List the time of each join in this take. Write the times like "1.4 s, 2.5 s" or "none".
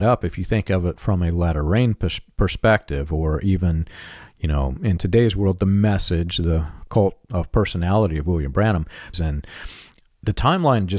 9.1 s